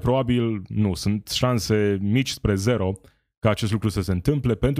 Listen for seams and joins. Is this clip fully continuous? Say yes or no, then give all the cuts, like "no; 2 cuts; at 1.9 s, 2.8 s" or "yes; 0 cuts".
yes; 0 cuts